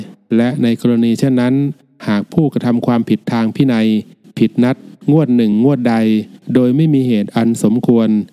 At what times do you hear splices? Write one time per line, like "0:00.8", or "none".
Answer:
none